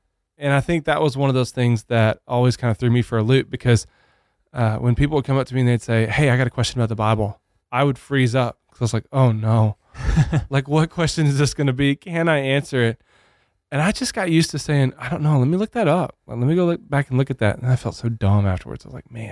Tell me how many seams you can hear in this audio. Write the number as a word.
zero